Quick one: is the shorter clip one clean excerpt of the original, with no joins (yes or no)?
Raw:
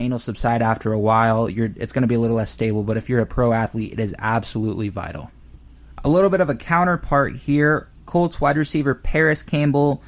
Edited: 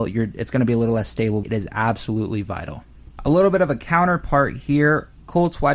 no